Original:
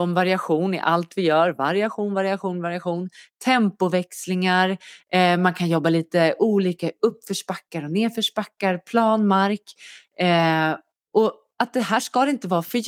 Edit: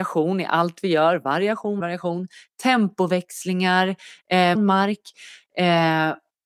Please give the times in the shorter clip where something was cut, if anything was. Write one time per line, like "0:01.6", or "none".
0:01.8
0:04.5